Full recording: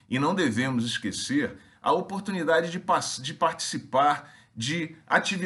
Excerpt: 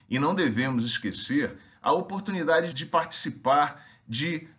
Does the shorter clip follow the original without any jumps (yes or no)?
no